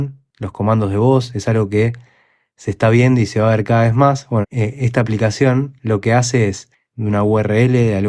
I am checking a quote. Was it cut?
yes; 2 cuts; at 4.4 s, 6.9 s

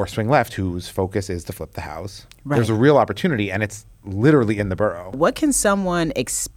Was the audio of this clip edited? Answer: no; 0 cuts

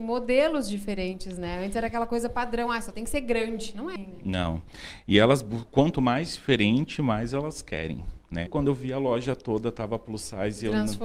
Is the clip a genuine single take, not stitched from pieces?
no; 2 cuts; at 4.0 s, 8.5 s

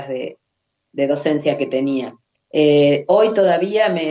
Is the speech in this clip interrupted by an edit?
yes; 1 cut; at 2.3 s

